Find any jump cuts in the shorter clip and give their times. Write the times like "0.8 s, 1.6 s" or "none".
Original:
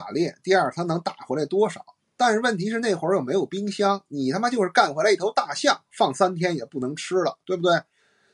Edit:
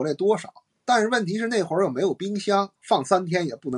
2.8 s